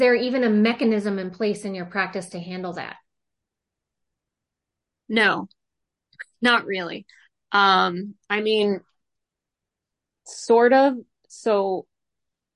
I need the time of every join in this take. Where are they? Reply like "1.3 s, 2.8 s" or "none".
none